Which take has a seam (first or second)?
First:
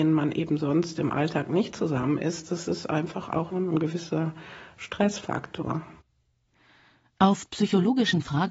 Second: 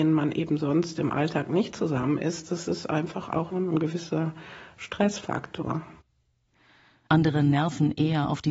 second